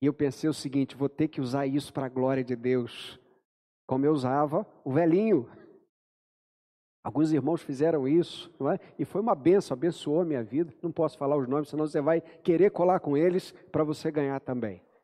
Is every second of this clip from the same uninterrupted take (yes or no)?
yes